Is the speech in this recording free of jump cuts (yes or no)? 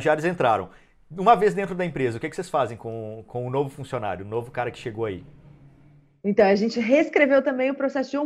yes